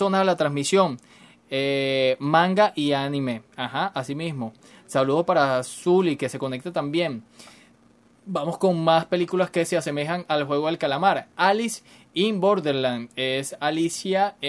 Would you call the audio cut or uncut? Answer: uncut